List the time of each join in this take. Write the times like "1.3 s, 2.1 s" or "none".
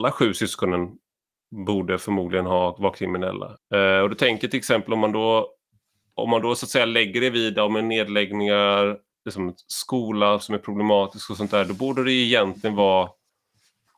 3.6 s, 9.2 s